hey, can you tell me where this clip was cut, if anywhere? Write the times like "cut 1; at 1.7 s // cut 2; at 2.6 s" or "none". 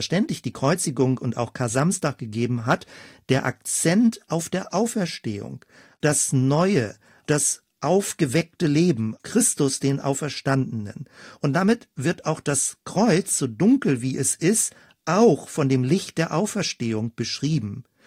none

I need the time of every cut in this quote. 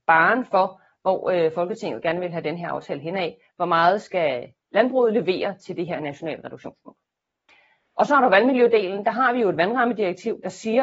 none

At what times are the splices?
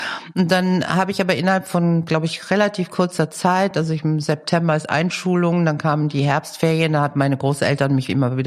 none

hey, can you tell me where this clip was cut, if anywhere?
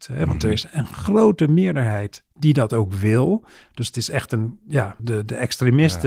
cut 1; at 5.0 s

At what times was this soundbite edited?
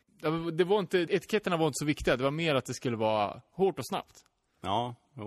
cut 1; at 1.1 s

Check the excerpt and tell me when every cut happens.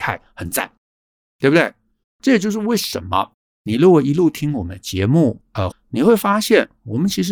cut 1; at 2.0 s // cut 2; at 5.7 s

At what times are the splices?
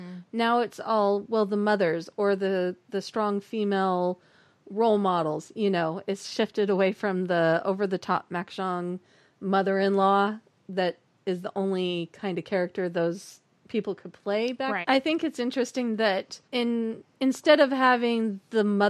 cut 1; at 14.8 s // cut 2; at 16.4 s

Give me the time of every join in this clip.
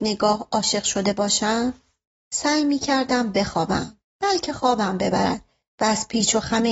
cut 1; at 4.0 s

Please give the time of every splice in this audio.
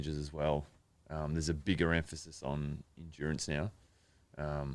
none

